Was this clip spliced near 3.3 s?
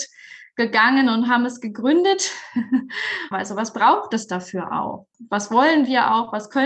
yes; 1 cut; at 3.3 s

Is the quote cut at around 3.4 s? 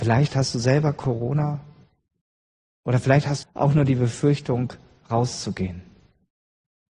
yes; 1 cut; at 3.4 s

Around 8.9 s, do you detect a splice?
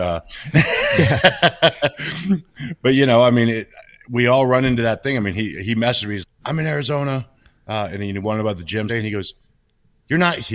yes; 2 cuts; at 6.2 s, 8.9 s

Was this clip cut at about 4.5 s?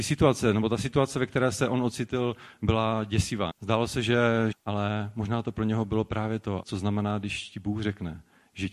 yes; 3 cuts; at 3.5 s, 4.5 s, 6.6 s

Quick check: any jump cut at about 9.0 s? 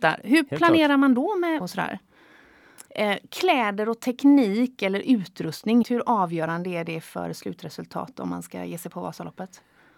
no; 3 cuts; at 1.6 s, 2.9 s, 5.8 s

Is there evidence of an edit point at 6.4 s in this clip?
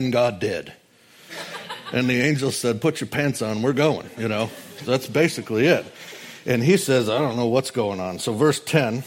no; 1 cut; at 1.3 s

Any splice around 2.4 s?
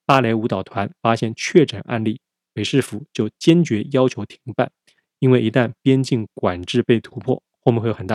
no; 0 cuts

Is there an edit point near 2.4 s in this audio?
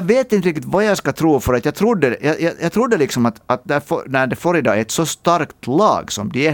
no; 0 cuts

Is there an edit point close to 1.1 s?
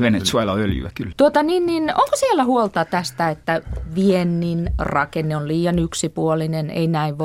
yes; 1 cut; at 1.1 s

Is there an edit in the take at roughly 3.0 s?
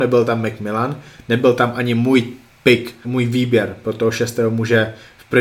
yes; 1 cut; at 3.0 s

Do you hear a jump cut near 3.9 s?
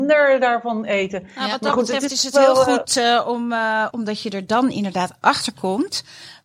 yes; 1 cut; at 3.9 s

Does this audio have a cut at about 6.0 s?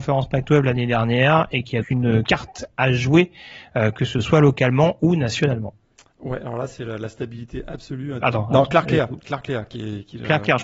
no; 2 cuts; at 1.8 s, 8.2 s

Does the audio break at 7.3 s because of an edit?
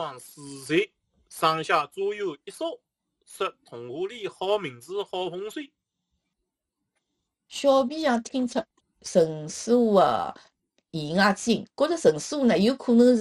no; 0 cuts

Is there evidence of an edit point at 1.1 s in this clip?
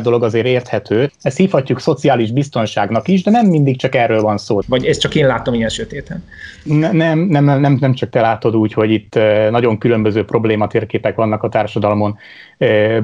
yes; 2 cuts; at 1.1 s, 4.6 s

